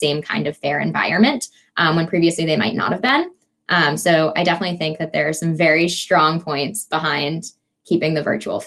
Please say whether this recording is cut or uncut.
uncut